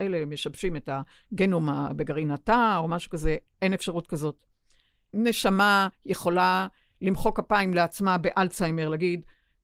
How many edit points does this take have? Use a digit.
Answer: 1